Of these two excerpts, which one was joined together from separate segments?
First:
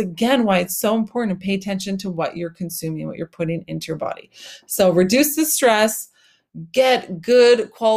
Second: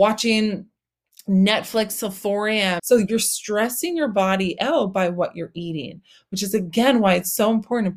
second; 1 cut; at 2.8 s

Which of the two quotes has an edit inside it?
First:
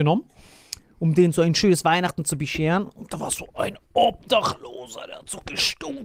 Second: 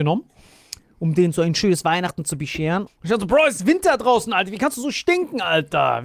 second; 1 cut; at 2.9 s

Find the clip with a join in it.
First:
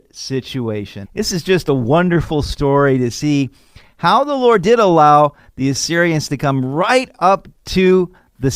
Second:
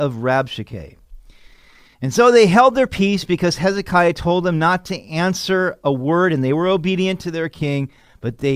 first; 1 cut; at 1.0 s

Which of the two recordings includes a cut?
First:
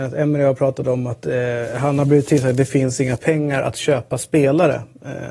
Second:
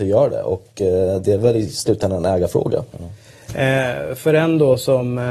second; 1 cut; at 2.9 s

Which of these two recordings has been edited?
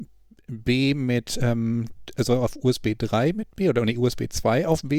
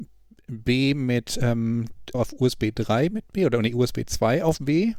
second; 1 cut; at 2.1 s

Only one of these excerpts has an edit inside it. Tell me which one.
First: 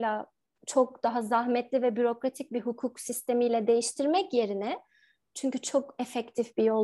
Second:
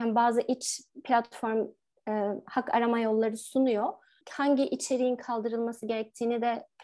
second; 1 cut; at 4.2 s

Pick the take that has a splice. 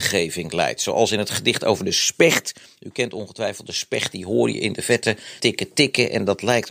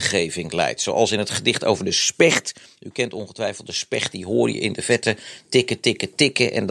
first; 1 cut; at 5.4 s

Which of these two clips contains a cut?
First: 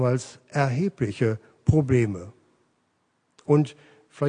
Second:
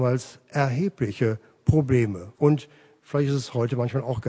second; 1 cut; at 2.3 s

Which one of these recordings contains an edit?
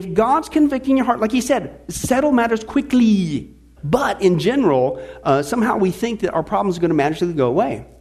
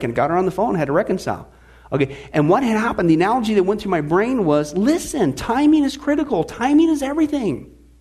first; 1 cut; at 3.8 s

